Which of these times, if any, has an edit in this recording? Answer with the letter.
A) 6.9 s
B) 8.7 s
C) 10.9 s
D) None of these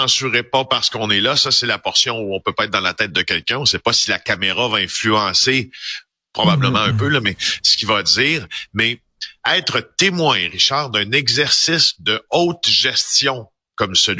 D